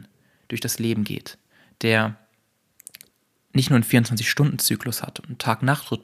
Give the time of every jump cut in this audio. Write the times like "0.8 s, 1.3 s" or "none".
none